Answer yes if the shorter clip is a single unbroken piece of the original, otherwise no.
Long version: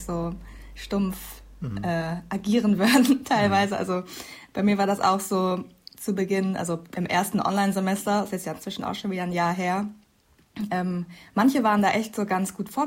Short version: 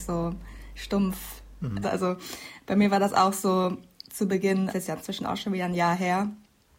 no